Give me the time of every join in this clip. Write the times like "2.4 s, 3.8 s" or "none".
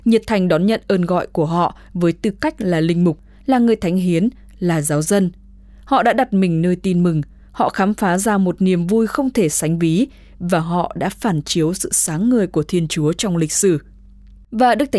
none